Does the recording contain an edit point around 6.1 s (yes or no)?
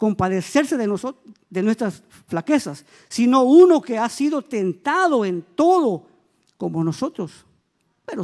no